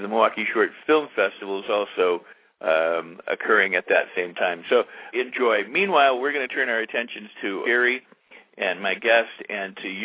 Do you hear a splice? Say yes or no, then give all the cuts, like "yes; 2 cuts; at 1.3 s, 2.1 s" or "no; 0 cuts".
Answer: yes; 2 cuts; at 5.1 s, 7.6 s